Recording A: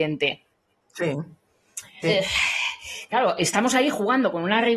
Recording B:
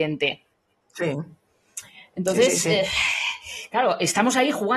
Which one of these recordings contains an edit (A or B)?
A